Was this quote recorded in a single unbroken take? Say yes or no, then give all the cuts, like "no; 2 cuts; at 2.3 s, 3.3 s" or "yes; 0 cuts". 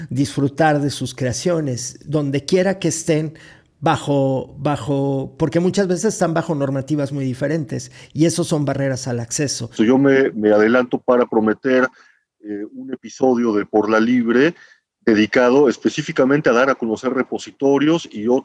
no; 1 cut; at 9.8 s